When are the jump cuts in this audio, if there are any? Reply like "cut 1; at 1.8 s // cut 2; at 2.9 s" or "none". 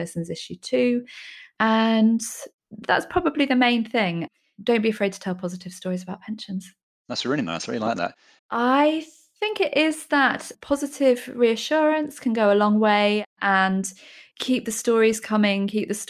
cut 1; at 8.4 s